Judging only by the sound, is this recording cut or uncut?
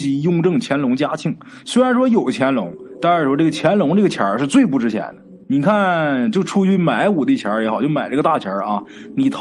cut